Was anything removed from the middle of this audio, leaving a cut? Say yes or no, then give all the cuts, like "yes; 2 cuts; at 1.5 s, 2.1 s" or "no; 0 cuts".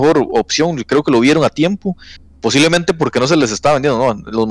no; 0 cuts